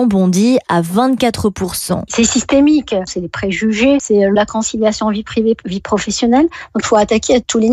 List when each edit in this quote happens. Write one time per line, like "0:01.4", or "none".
0:02.1
0:04.0

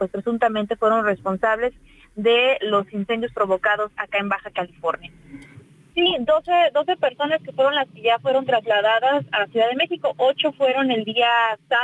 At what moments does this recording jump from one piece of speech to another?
0:05.9

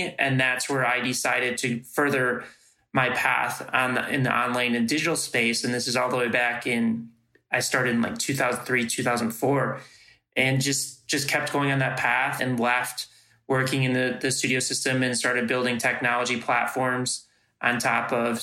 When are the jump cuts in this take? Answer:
0:12.4

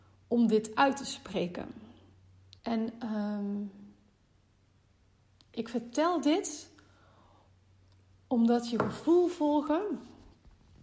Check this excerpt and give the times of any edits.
0:02.6

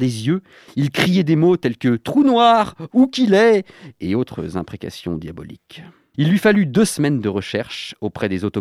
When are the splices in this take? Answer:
0:02.9
0:06.1

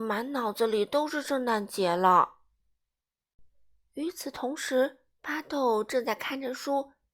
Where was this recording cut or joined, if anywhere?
0:05.1

